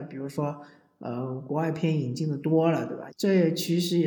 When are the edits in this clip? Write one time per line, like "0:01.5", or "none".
0:03.1